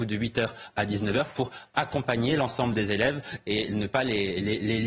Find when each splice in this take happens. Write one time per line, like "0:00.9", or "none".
none